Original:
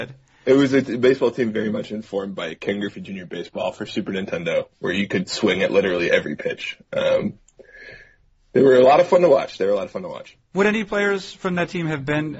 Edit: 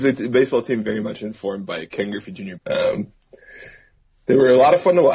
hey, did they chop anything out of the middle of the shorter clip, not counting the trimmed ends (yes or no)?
yes